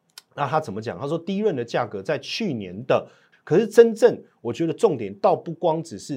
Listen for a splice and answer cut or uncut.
cut